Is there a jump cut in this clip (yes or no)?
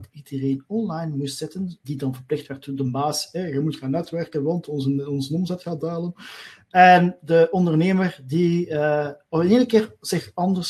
yes